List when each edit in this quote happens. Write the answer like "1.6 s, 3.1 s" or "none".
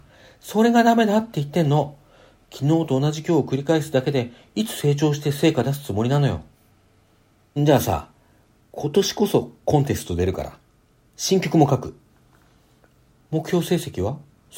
7.6 s